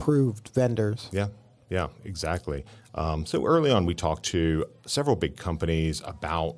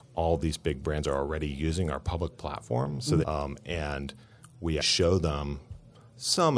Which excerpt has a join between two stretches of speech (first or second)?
second